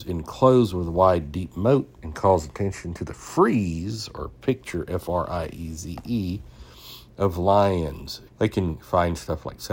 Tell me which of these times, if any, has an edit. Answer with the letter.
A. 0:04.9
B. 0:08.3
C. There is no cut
B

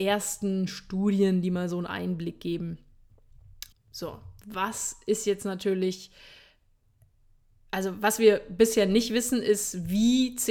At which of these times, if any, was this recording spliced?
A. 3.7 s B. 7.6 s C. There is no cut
A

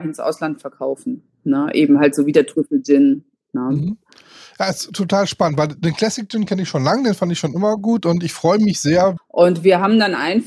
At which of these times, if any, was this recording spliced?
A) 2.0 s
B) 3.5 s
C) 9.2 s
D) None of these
C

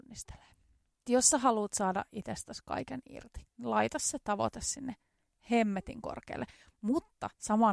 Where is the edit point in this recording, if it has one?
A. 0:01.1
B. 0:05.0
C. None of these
A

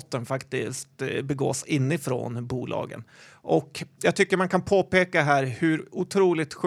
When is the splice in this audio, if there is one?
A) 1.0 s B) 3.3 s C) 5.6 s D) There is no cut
D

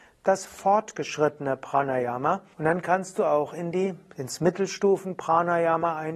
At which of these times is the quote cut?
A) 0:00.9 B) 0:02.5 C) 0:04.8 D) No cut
B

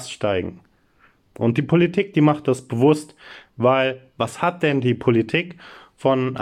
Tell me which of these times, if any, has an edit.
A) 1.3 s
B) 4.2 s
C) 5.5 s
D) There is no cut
A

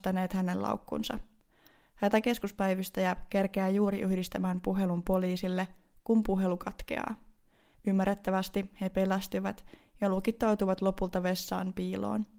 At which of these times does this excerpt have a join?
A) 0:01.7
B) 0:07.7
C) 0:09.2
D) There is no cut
B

